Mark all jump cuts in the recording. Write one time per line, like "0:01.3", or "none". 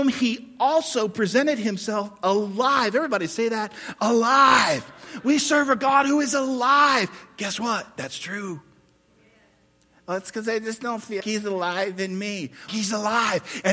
0:11.2
0:12.7